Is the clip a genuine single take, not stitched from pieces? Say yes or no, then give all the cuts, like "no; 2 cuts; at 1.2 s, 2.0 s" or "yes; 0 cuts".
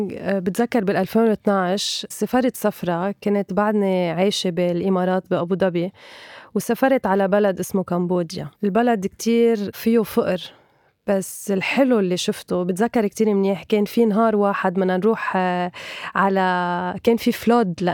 no; 1 cut; at 8.5 s